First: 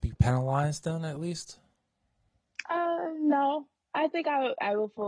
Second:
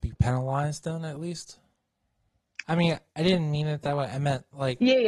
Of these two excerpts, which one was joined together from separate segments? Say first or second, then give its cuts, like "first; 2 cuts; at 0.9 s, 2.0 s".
second; 1 cut; at 2.6 s